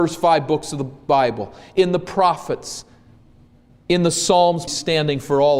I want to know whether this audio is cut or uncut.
cut